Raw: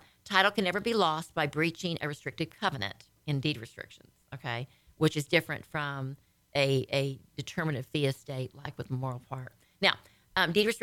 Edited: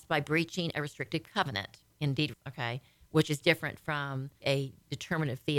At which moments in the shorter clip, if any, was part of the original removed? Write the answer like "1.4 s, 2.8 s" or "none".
2.3 s, 4.4 s